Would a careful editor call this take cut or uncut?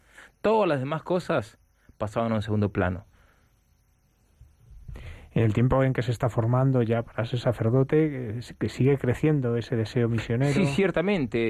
uncut